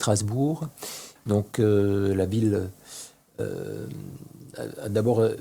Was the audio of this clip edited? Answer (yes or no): yes